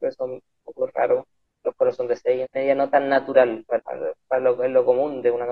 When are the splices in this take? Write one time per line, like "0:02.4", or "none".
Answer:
0:02.4
0:03.8